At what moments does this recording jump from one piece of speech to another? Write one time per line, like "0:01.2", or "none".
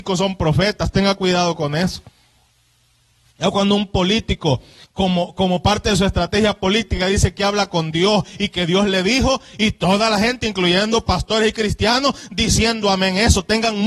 none